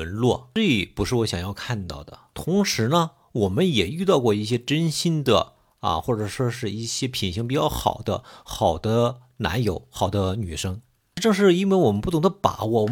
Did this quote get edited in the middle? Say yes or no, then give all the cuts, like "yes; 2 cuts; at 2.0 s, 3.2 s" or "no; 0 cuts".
no; 0 cuts